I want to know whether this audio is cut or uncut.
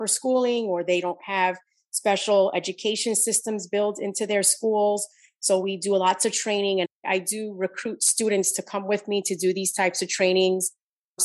uncut